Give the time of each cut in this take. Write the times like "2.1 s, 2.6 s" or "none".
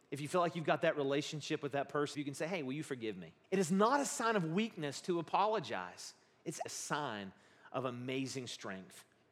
2.1 s, 3.4 s, 6.7 s